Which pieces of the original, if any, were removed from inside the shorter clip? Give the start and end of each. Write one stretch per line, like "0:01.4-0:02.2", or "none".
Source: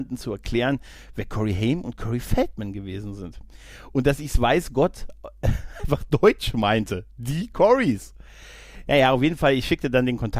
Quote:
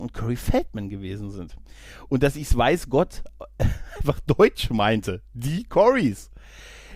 none